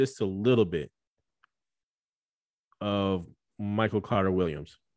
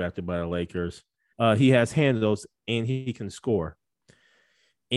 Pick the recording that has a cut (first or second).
second